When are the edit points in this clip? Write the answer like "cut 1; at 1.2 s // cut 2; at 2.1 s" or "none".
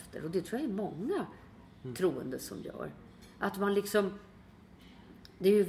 none